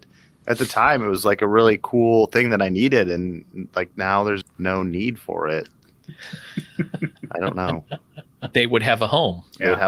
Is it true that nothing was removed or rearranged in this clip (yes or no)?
no